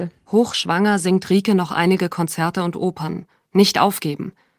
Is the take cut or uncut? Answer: cut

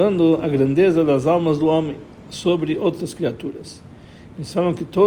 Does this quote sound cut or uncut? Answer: uncut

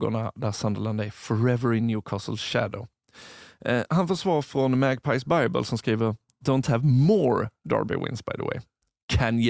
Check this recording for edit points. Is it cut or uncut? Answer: uncut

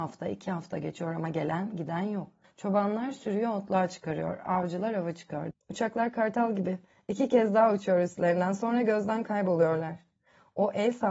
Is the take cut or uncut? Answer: cut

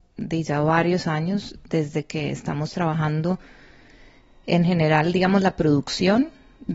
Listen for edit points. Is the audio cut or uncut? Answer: uncut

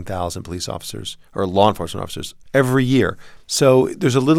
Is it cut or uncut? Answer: uncut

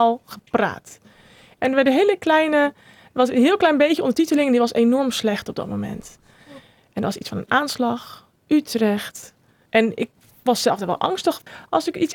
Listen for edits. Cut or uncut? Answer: cut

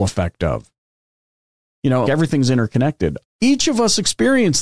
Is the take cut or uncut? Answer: cut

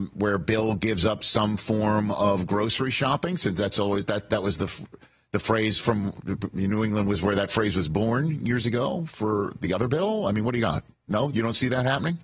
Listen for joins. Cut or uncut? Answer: uncut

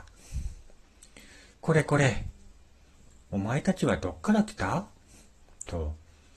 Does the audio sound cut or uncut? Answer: cut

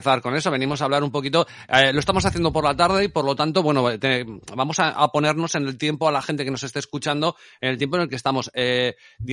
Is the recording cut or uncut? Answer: uncut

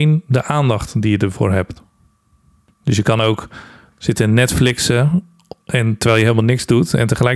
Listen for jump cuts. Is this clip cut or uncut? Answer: uncut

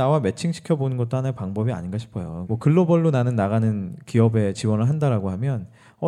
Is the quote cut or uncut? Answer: cut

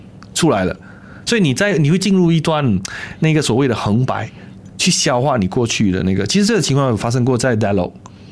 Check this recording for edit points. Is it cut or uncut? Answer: uncut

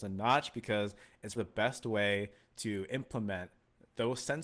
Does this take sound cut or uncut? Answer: cut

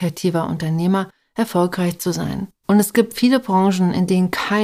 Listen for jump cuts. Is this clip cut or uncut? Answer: cut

